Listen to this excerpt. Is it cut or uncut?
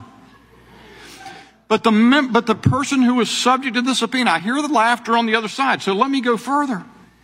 uncut